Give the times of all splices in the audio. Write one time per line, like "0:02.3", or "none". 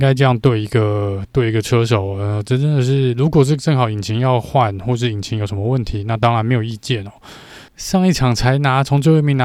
0:07.7